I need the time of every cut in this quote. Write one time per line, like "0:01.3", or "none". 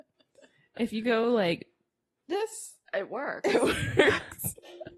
none